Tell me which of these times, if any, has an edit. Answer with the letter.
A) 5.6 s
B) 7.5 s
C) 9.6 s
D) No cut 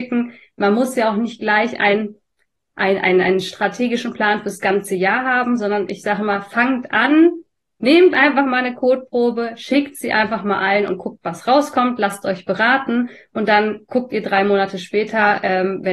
D